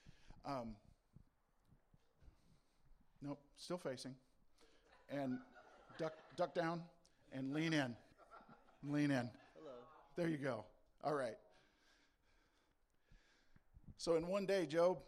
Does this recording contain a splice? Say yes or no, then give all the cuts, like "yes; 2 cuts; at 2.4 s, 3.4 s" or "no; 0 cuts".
no; 0 cuts